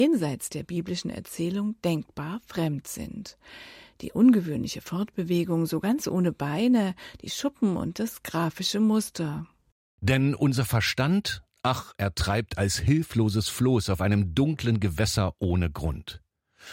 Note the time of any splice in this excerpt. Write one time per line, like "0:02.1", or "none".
none